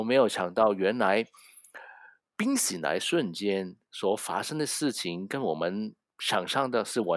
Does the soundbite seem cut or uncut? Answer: uncut